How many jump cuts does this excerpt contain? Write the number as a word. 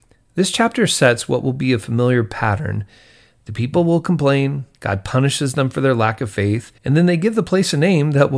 two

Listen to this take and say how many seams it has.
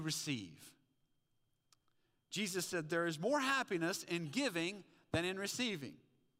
zero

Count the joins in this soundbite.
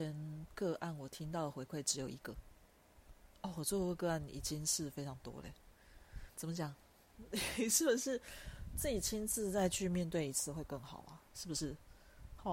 two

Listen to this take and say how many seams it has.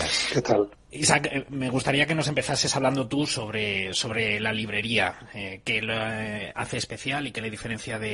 zero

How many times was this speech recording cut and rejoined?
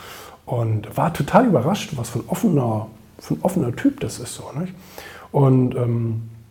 zero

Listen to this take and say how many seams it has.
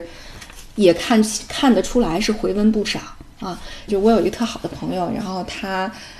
one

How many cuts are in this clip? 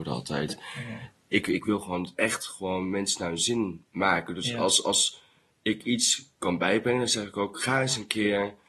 zero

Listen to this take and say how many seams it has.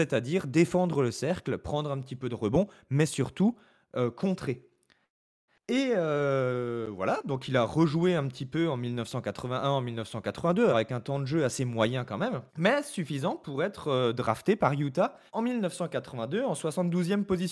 three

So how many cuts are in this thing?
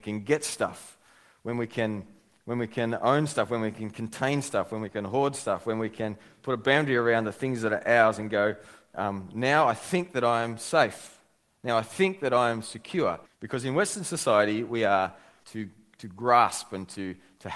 three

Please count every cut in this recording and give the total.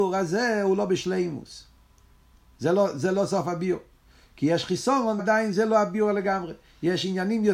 one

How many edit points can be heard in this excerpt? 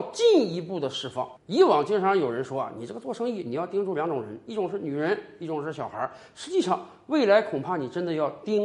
zero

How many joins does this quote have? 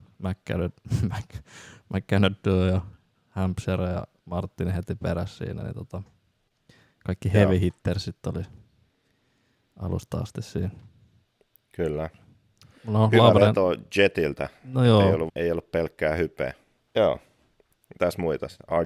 two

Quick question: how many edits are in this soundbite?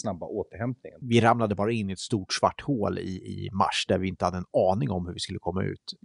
one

